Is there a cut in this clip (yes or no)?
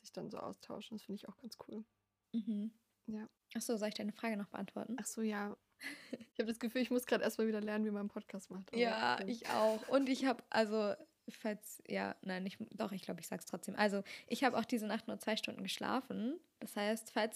no